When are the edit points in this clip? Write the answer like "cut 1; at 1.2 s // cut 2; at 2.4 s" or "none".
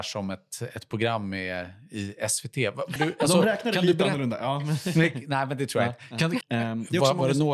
cut 1; at 3.0 s // cut 2; at 6.4 s